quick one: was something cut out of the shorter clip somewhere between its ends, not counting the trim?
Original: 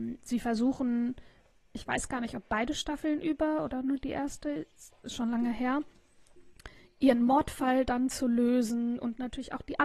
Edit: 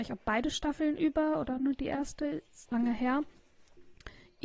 yes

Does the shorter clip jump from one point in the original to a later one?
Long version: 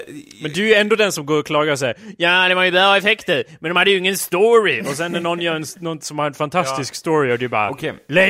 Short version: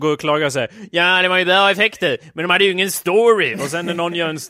no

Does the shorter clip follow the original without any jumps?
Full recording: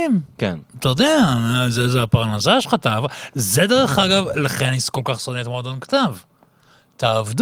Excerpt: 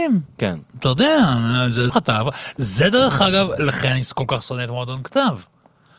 no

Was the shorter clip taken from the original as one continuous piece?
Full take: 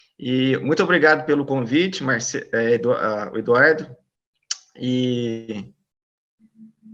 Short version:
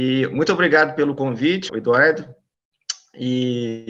no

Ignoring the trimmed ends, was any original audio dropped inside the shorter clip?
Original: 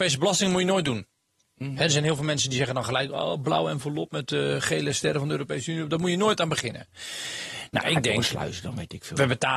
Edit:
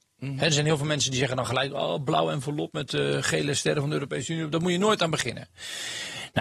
no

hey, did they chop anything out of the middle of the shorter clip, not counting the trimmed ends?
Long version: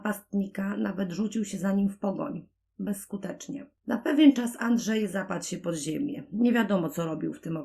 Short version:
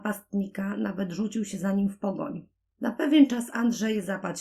yes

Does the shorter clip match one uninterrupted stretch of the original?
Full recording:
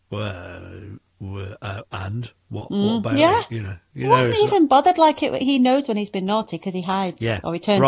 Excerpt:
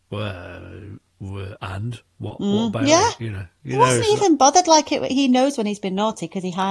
no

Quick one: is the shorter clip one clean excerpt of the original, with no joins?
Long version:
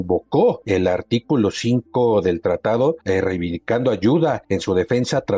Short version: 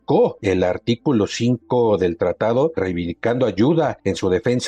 no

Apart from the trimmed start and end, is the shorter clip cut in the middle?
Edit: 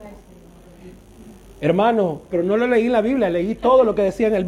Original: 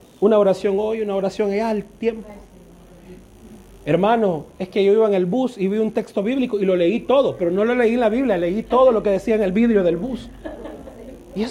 yes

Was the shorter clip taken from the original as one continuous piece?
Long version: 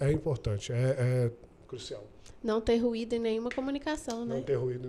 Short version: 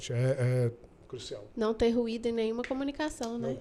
no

